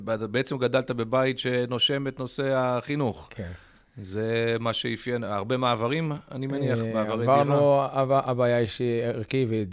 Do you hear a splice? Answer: no; 0 cuts

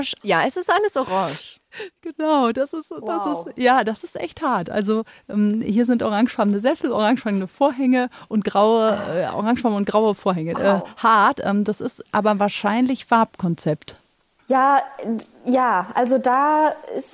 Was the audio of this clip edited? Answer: yes; 1 cut; at 10.5 s

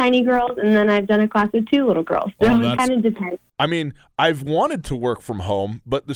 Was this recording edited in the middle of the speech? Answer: yes; 1 cut; at 3.5 s

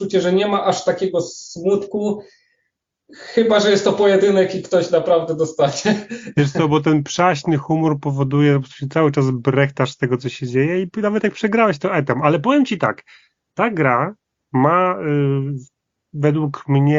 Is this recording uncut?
yes; 0 cuts

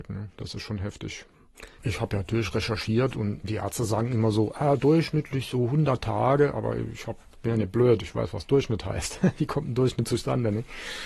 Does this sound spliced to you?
yes; 1 cut; at 1.8 s

